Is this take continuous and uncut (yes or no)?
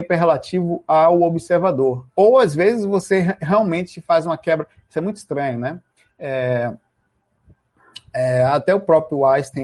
no